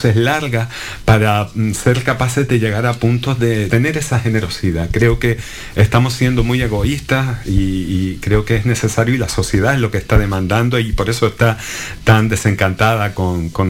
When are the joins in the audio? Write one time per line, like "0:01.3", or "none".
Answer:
0:03.7